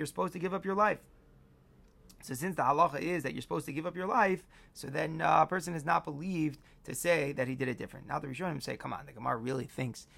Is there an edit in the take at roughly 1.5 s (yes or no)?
no